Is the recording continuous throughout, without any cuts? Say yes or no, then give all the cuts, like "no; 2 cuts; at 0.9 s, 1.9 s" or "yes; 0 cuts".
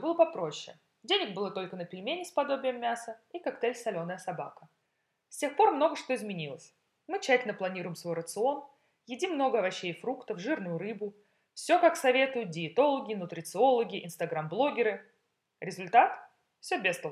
yes; 0 cuts